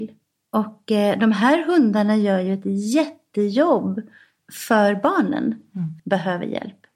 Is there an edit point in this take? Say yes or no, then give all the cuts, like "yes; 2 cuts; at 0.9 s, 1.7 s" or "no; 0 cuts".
yes; 1 cut; at 6.0 s